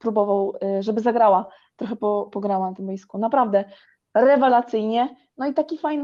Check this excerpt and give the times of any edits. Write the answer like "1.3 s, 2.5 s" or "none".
none